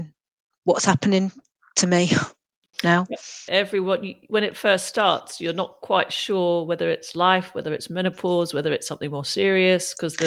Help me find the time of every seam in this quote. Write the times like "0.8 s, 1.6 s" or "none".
3.5 s